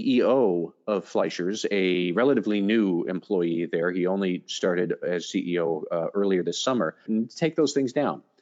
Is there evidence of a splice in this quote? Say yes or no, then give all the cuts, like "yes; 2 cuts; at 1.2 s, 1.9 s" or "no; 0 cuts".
yes; 1 cut; at 7.1 s